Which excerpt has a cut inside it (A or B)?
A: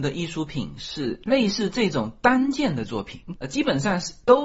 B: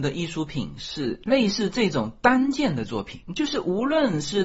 A